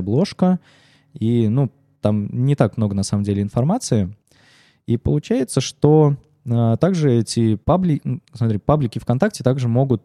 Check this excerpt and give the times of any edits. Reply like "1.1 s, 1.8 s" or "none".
7.6 s